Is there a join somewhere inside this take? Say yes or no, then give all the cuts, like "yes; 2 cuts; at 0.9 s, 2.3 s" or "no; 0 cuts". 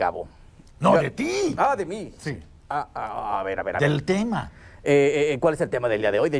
no; 0 cuts